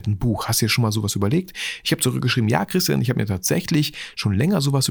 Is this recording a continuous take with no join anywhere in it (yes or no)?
yes